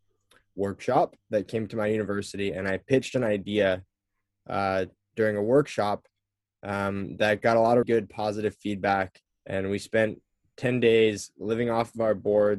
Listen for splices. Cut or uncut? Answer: cut